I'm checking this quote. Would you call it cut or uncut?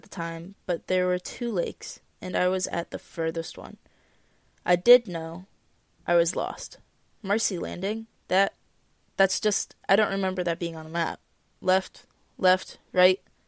uncut